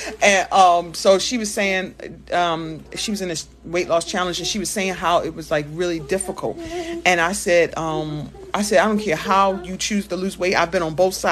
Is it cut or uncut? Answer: cut